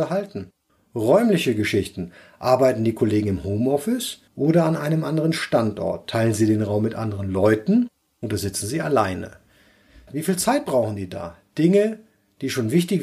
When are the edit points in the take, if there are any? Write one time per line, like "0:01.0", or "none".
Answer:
0:04.3
0:10.1